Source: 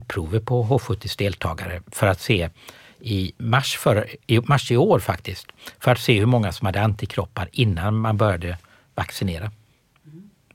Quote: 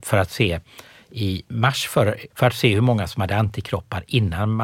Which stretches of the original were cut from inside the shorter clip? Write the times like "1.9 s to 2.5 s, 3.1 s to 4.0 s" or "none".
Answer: 4.2 s to 5.7 s